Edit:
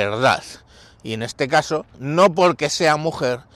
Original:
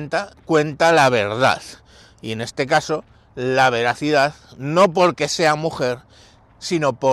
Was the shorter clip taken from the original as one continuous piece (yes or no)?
no